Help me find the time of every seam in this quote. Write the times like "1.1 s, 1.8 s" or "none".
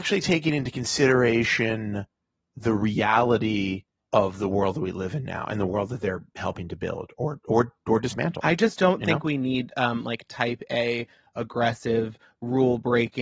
4.1 s